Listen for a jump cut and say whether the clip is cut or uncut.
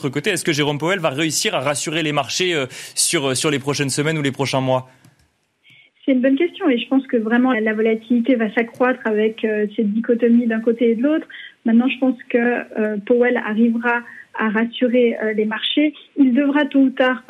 cut